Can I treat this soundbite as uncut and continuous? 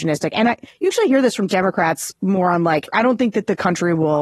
yes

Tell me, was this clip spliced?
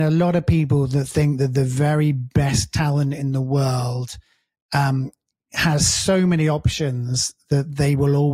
no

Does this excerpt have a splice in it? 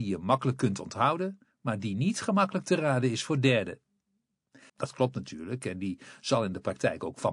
yes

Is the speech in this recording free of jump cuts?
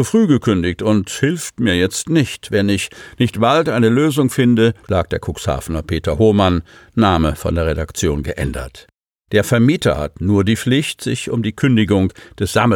no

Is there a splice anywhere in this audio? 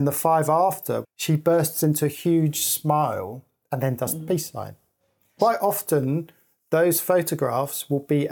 yes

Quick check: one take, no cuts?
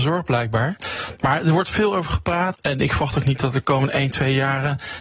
no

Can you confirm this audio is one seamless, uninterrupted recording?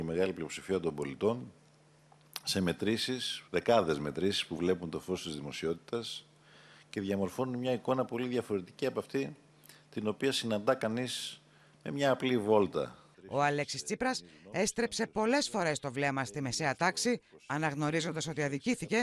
no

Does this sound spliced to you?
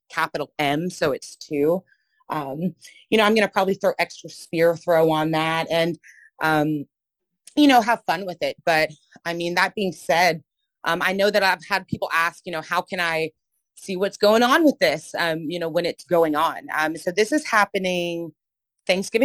no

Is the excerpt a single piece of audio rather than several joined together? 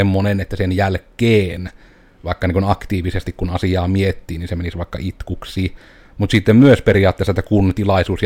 no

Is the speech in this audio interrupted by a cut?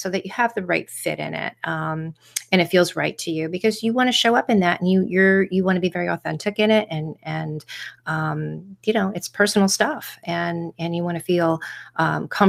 no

